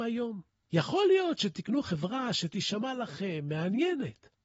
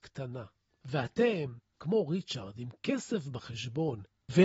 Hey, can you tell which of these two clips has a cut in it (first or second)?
second